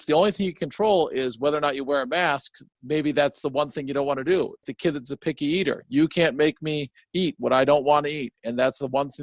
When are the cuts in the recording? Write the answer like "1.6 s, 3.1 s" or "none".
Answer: 4.6 s